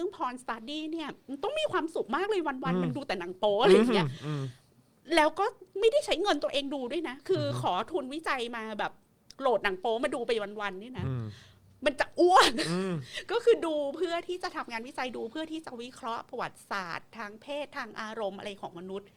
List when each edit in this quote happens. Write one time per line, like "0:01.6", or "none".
none